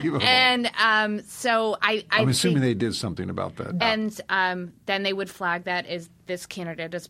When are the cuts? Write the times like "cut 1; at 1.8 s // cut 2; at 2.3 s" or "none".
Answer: cut 1; at 3.8 s